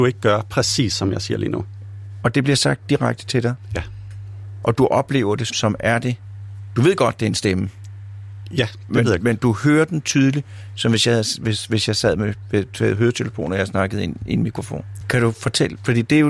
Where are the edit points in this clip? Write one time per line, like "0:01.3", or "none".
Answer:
0:05.5
0:15.0

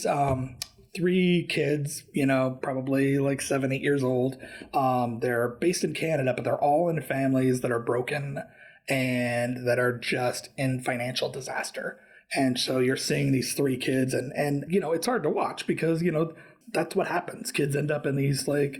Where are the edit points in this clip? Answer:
none

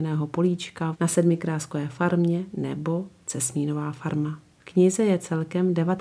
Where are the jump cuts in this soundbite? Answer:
0:00.9

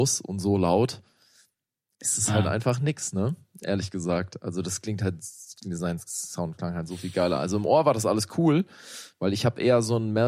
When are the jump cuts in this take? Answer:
none

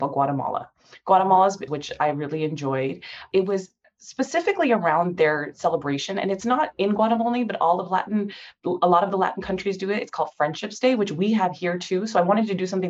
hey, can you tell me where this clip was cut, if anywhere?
0:01.7

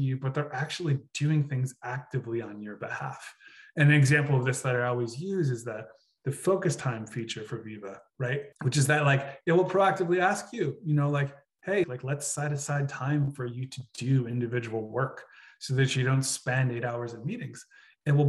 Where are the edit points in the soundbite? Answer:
0:08.5
0:11.8

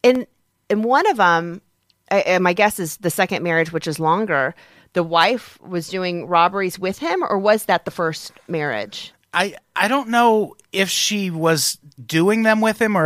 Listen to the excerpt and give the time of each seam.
0:12.0

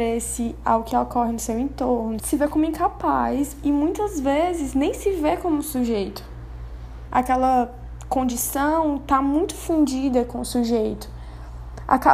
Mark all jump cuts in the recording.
0:02.2
0:07.1

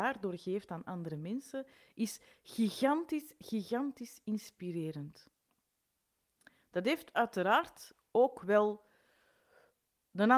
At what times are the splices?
none

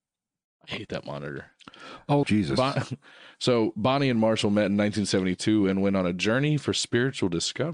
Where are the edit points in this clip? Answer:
0:02.2

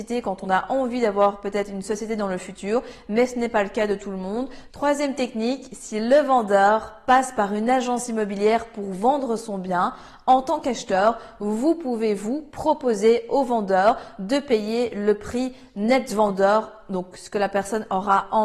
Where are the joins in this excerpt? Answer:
0:04.7

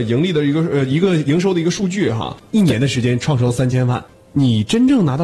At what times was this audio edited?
none

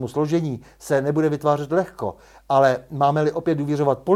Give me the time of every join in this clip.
none

